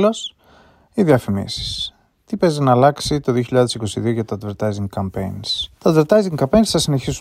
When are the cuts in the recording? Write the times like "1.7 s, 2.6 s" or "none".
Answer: 5.8 s